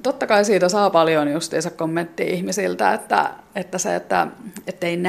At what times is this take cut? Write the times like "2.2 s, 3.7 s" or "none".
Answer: none